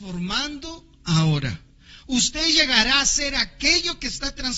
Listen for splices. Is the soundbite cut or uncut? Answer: uncut